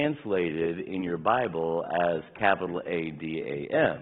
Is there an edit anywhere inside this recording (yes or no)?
no